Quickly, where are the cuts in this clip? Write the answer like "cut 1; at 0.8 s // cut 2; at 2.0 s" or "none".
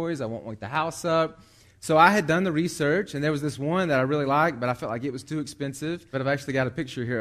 cut 1; at 6.1 s

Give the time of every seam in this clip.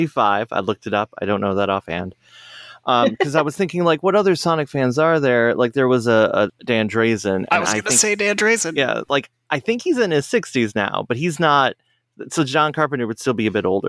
cut 1; at 6.5 s

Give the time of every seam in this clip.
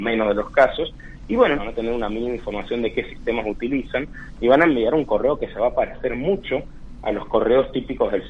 cut 1; at 1.5 s

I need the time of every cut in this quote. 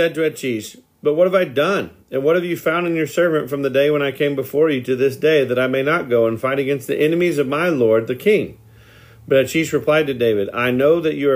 none

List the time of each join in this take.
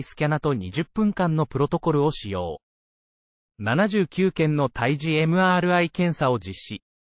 none

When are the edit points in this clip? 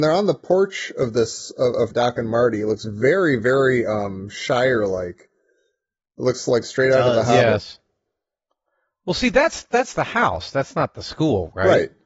cut 1; at 1.9 s

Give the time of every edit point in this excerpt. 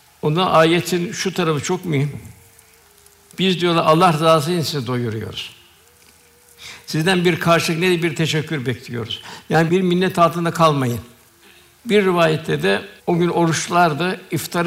cut 1; at 11.8 s // cut 2; at 13.0 s

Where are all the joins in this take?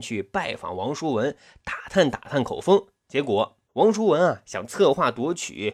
cut 1; at 3.7 s

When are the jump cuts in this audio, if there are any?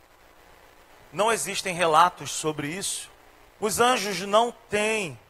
cut 1; at 3.5 s

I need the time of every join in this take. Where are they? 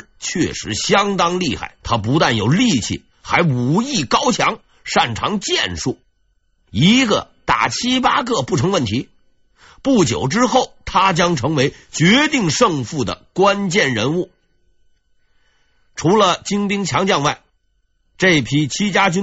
cut 1; at 1.8 s

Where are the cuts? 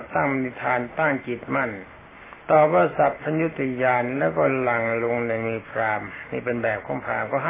cut 1; at 2.4 s

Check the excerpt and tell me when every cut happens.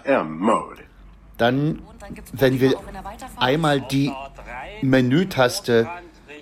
none

